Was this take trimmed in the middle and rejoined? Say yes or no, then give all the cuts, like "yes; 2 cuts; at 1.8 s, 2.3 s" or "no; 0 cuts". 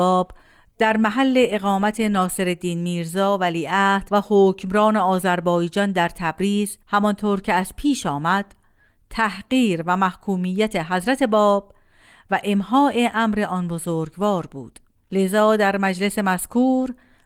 yes; 1 cut; at 6.8 s